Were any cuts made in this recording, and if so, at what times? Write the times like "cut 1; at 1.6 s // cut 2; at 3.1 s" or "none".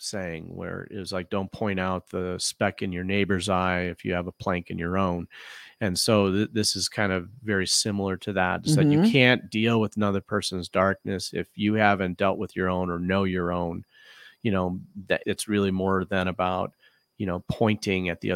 cut 1; at 15.2 s